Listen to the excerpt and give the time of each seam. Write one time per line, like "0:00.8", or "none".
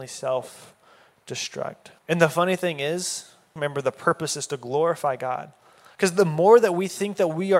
0:02.0
0:03.6
0:06.0